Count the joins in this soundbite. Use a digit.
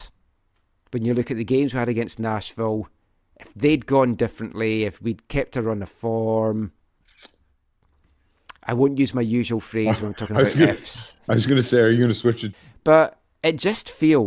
0